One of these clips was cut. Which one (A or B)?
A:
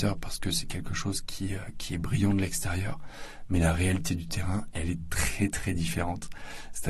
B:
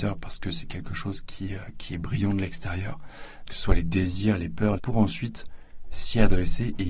B